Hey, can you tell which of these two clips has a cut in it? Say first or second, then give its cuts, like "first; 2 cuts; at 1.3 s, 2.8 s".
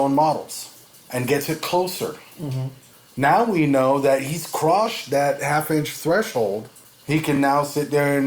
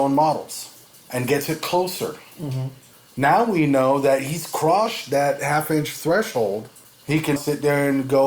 second; 1 cut; at 7.4 s